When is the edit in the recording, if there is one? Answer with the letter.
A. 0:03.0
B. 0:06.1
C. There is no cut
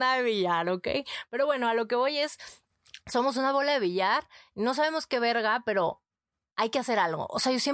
C